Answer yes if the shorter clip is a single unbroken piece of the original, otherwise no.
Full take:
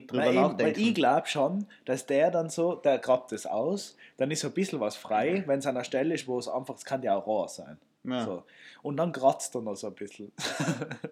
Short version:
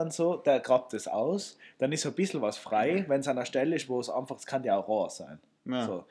yes